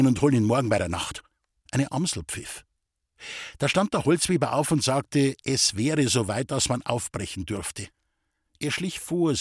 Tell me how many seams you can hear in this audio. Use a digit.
1